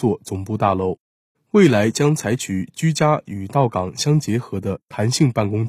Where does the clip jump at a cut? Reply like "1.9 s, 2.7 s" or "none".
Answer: 1.3 s